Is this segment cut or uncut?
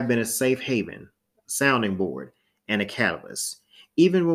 uncut